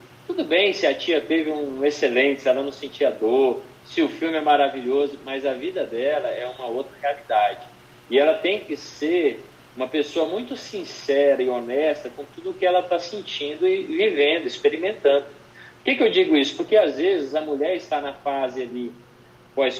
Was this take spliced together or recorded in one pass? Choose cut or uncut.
uncut